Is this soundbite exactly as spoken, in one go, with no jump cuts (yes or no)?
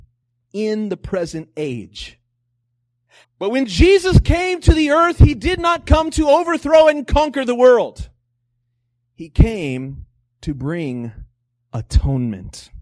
no